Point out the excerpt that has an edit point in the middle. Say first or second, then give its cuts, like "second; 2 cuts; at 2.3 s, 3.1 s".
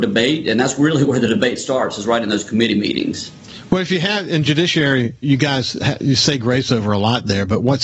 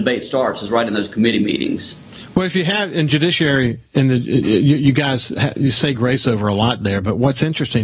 first; 1 cut; at 5.2 s